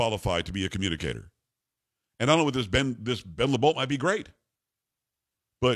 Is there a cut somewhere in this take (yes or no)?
no